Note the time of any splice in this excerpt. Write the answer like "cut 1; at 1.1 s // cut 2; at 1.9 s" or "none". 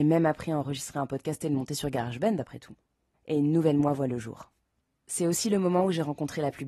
cut 1; at 3.1 s